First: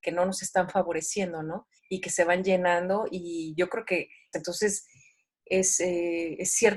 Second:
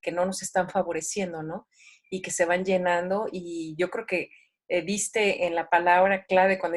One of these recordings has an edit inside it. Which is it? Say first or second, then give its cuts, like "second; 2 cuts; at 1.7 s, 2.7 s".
first; 2 cuts; at 1.8 s, 4.3 s